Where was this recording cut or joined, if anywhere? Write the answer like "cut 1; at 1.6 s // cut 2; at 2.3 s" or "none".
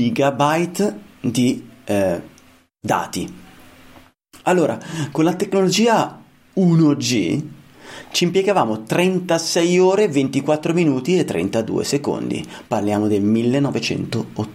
none